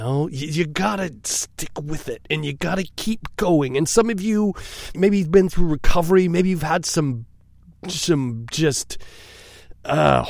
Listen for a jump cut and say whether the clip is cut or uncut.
cut